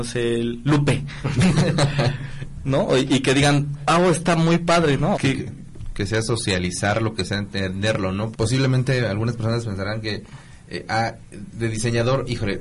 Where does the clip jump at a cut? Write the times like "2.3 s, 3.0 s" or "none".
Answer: 5.1 s, 8.3 s